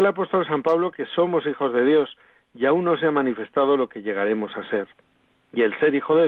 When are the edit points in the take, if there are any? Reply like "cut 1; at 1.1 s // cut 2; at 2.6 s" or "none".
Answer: none